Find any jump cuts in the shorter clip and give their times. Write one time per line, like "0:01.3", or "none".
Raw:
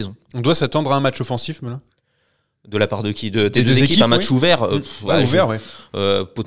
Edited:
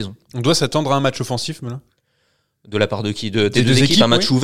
none